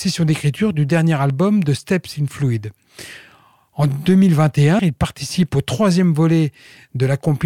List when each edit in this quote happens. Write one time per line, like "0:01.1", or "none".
0:04.8